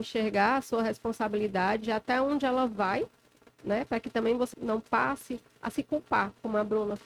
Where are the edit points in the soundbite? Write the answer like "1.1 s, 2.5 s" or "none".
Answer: 4.5 s